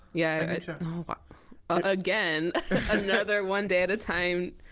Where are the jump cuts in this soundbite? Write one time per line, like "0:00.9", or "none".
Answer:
none